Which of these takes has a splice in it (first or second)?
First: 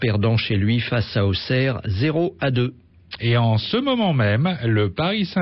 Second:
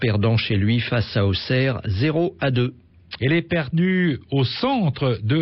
second